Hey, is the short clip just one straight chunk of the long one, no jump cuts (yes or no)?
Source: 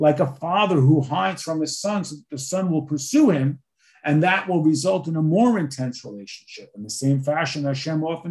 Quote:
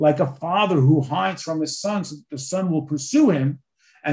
yes